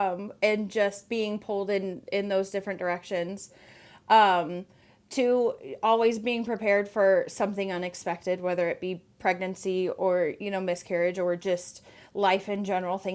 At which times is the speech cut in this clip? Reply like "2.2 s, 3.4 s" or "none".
none